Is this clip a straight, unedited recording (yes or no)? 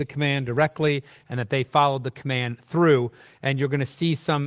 yes